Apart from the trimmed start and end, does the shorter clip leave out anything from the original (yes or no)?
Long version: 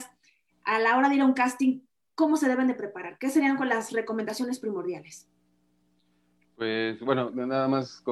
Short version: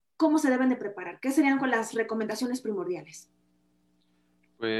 no